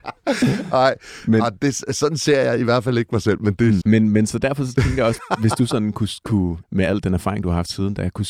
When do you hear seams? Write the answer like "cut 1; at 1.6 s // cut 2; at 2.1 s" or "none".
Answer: cut 1; at 3.8 s // cut 2; at 5.2 s // cut 3; at 6.6 s